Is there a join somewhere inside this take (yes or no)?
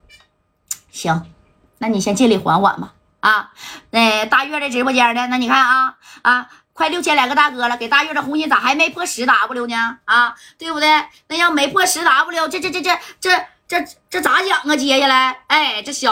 no